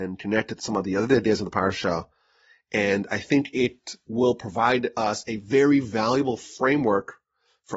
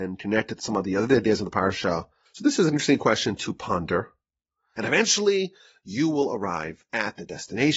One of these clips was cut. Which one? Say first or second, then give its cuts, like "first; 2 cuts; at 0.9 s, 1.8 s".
second; 2 cuts; at 2.3 s, 4.8 s